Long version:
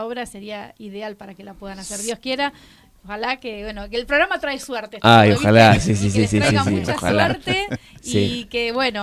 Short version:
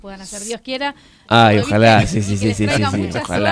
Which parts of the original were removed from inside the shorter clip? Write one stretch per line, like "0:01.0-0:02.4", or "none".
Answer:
0:02.8-0:05.0